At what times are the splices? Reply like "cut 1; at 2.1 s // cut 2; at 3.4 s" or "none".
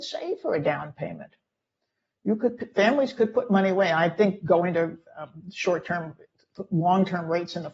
none

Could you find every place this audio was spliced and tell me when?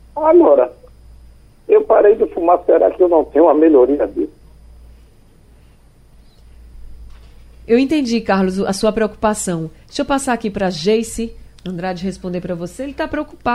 none

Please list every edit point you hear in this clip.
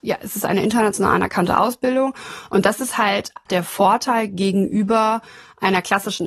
cut 1; at 3.5 s

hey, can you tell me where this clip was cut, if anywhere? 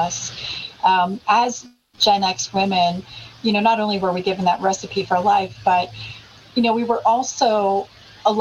none

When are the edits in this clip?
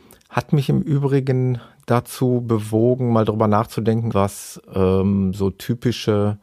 cut 1; at 4.1 s

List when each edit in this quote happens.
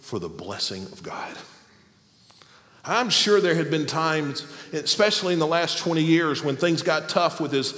none

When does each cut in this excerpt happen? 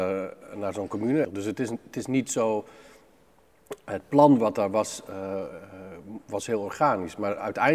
cut 1; at 1.2 s

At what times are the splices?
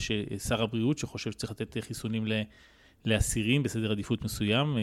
none

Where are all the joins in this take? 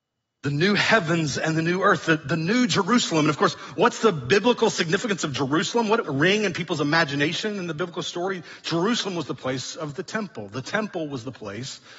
cut 1; at 6.0 s

